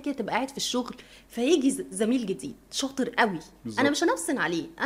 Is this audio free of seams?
yes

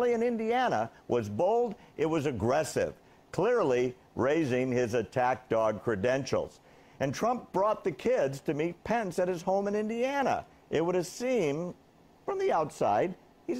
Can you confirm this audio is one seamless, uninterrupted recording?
yes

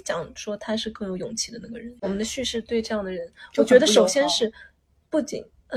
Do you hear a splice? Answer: no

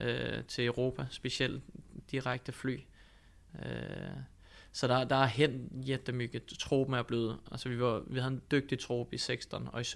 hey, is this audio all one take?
no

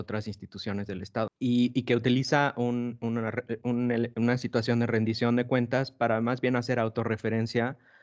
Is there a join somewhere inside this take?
yes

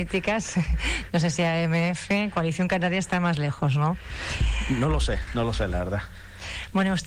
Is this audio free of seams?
yes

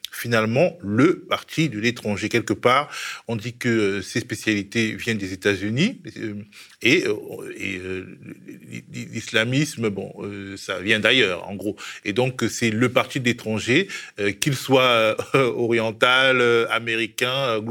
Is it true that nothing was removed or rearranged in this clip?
yes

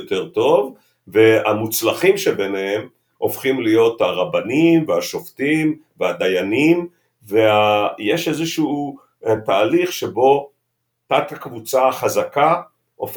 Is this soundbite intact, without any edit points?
yes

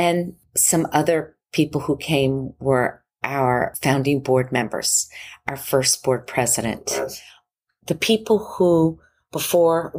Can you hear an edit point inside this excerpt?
no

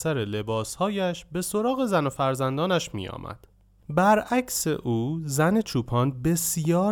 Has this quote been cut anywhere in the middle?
no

